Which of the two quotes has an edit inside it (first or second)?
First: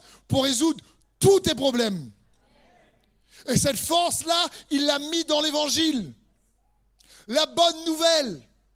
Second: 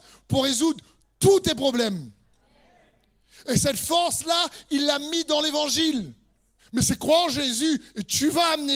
second